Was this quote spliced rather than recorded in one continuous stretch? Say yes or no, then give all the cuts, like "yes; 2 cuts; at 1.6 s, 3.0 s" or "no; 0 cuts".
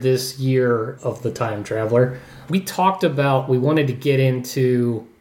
yes; 2 cuts; at 1.0 s, 2.5 s